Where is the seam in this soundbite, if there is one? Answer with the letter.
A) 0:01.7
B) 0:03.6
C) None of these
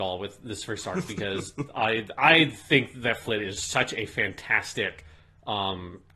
B